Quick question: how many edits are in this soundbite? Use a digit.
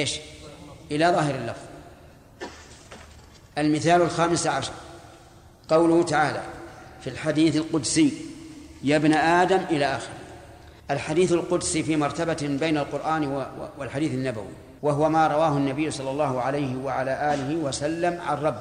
2